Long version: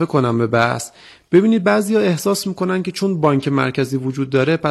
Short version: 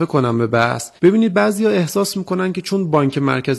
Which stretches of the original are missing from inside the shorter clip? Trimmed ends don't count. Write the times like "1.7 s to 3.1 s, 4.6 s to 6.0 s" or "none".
1.0 s to 1.3 s